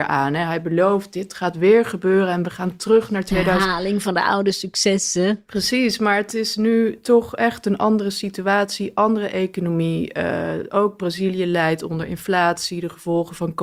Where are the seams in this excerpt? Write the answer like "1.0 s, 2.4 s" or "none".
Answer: none